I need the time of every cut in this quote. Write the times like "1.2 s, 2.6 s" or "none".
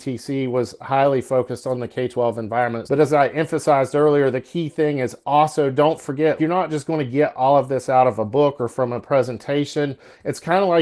2.9 s, 6.4 s